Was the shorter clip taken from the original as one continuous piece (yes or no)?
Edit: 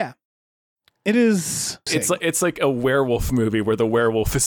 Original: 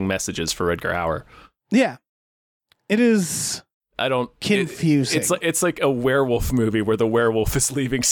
no